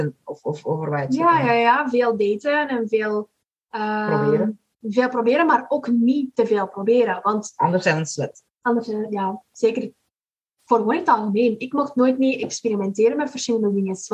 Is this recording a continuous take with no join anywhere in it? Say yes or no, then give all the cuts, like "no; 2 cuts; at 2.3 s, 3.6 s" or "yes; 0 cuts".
yes; 0 cuts